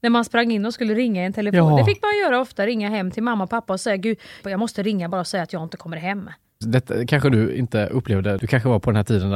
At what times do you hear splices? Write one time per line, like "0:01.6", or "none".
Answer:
0:04.4
0:06.6